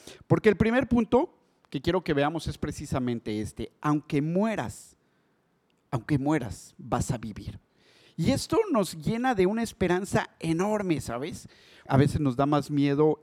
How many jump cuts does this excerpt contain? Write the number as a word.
one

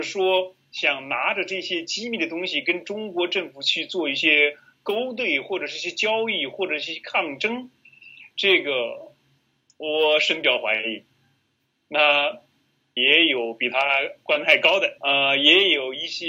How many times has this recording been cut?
two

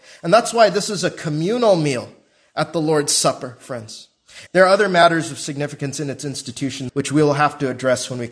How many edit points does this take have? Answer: two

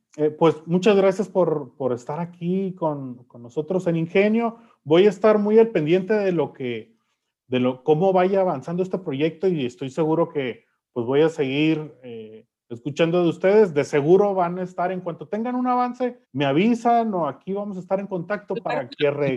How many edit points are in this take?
one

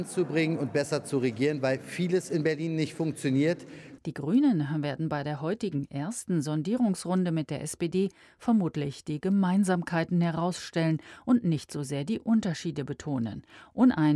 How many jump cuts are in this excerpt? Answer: one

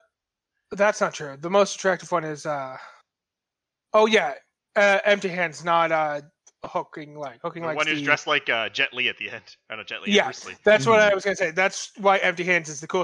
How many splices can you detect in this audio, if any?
zero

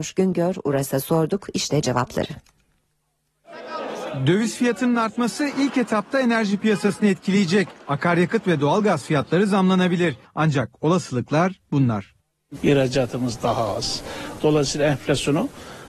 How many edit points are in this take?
three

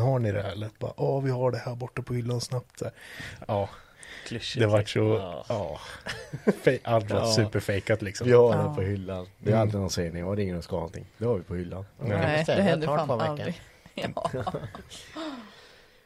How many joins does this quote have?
one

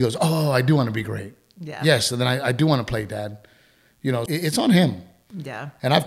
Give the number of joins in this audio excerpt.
one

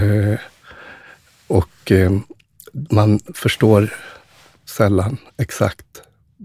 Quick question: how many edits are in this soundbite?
zero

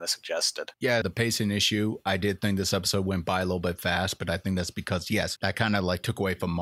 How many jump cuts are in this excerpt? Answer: two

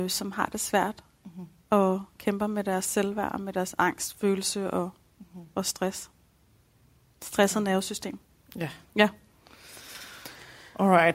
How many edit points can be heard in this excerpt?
zero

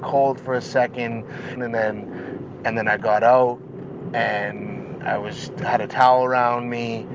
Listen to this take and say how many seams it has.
one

